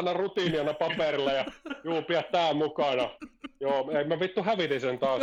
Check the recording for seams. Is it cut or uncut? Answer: uncut